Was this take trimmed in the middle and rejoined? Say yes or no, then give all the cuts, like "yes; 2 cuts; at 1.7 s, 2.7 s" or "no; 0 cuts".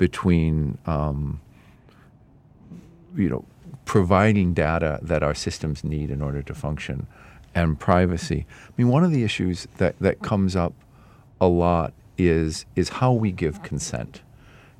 no; 0 cuts